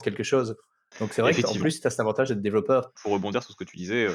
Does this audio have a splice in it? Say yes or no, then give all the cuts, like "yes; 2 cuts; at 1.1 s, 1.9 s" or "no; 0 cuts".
yes; 1 cut; at 2.9 s